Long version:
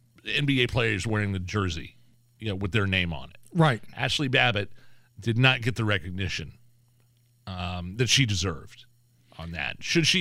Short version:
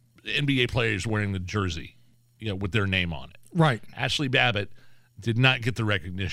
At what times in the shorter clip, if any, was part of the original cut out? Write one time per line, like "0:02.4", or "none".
none

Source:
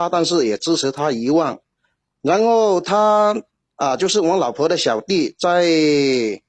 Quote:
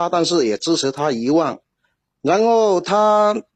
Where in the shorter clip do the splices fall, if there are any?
none

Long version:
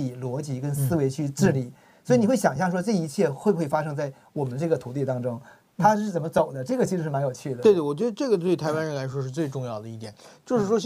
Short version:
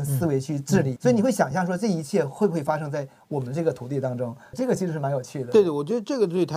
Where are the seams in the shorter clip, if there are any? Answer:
0:01.0
0:04.5

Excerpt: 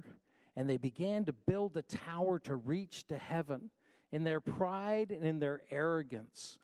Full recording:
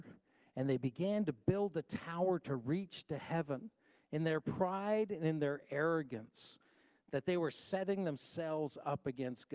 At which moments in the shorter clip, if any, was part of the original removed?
none

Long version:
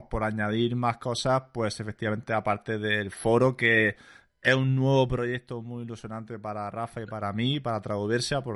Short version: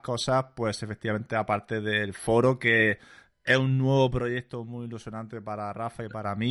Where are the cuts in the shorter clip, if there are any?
none

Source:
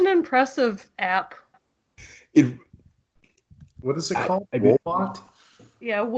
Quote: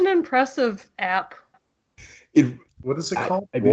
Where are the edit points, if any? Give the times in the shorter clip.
0:02.7

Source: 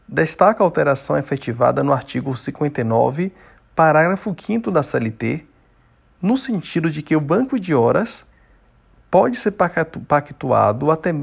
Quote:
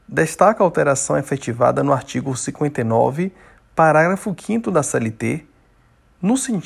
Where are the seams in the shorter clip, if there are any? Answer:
none

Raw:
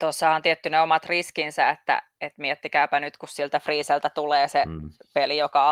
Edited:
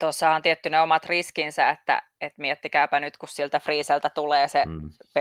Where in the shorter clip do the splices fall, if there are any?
none

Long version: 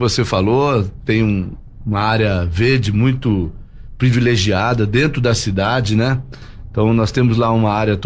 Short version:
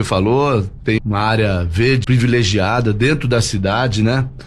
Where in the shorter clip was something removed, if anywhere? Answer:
0:01.0
0:02.0

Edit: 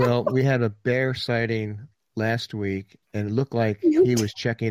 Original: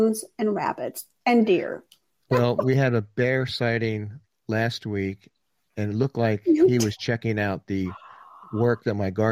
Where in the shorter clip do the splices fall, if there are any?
0:03.0

